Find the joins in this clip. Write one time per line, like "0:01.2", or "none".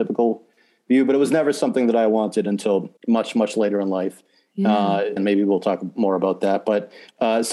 0:03.0
0:05.2